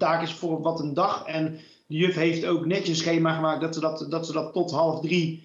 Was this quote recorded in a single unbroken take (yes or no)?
yes